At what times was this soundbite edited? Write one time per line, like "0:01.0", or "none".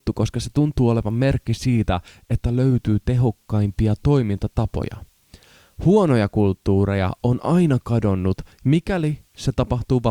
0:08.6